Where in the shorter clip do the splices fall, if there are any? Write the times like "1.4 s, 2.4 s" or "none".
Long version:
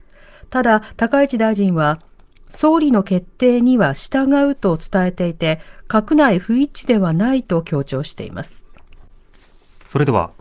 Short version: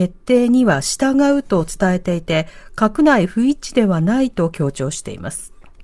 none